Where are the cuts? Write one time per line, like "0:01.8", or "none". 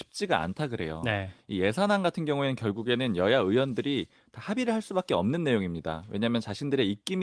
none